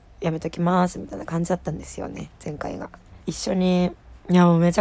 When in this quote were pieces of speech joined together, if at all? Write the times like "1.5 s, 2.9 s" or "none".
3.2 s